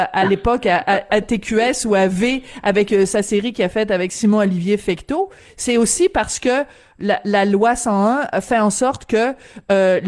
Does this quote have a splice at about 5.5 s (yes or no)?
no